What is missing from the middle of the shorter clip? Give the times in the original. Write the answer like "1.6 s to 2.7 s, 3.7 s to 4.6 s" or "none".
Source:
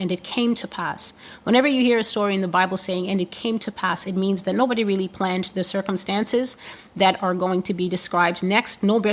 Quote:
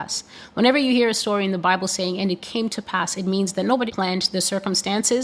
4.8 s to 5.1 s

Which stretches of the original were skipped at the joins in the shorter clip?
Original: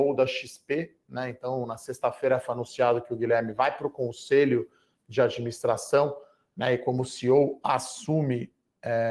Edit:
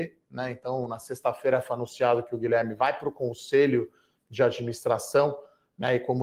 none

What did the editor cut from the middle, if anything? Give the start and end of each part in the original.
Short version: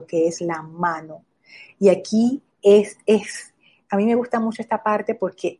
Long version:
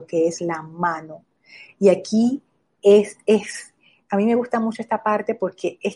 2.5 s to 2.7 s

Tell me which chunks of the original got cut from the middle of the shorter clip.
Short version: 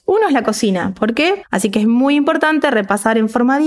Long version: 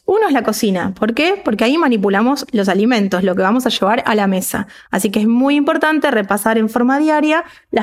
1.4 s to 4.8 s

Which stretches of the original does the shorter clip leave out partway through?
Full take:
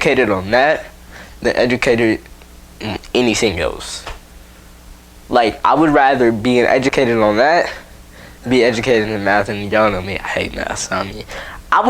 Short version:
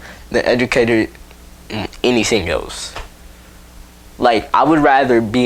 none

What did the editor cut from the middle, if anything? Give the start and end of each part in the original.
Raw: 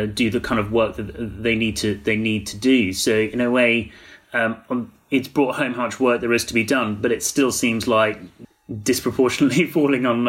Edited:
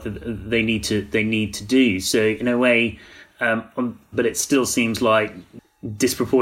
5.0 s to 7.0 s

